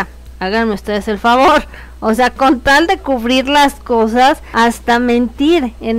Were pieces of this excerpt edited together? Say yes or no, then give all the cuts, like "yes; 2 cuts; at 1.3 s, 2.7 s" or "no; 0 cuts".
no; 0 cuts